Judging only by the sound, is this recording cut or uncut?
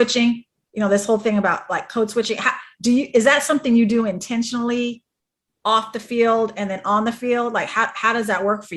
uncut